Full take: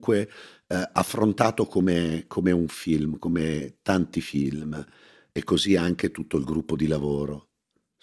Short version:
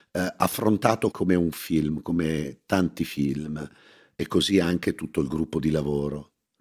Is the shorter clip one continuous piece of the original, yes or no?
no